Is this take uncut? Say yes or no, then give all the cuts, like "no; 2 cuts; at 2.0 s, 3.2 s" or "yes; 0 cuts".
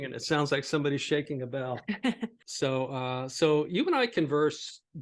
no; 1 cut; at 2.4 s